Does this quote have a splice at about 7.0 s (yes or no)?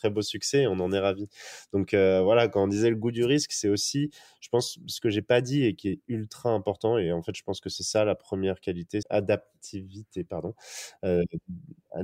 no